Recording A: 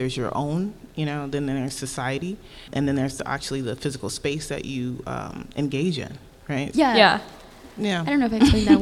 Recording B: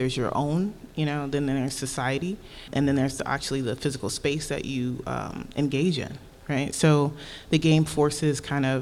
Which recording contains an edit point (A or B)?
A